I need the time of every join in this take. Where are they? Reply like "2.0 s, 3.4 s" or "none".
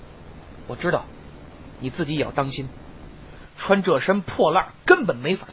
3.5 s